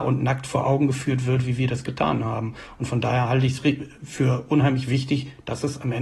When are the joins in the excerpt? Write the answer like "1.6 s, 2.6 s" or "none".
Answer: none